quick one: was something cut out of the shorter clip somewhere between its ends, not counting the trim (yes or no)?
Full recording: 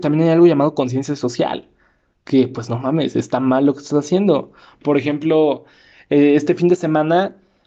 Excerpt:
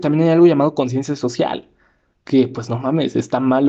no